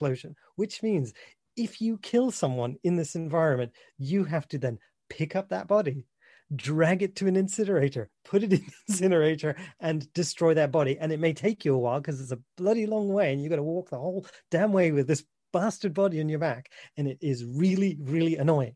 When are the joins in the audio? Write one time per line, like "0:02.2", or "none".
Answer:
none

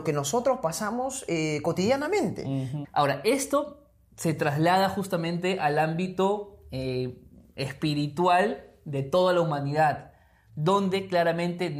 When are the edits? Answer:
0:02.8

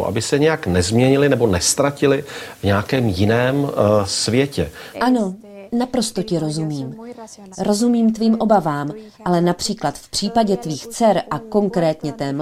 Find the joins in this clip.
0:04.9
0:07.5

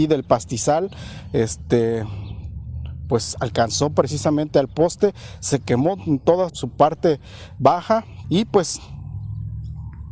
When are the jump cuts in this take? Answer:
0:06.5
0:08.2

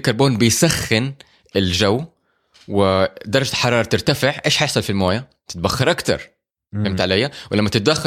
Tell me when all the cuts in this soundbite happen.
none

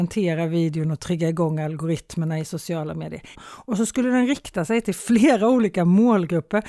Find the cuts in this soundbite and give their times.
0:03.3

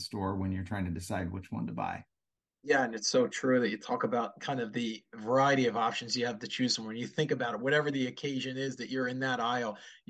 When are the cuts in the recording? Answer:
none

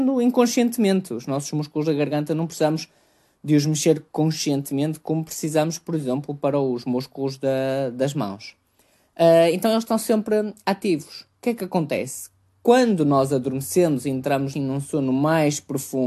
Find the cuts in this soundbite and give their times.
0:14.5

